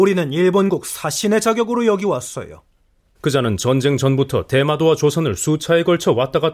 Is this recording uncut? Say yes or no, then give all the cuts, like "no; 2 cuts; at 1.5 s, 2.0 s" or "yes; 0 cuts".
no; 1 cut; at 3.2 s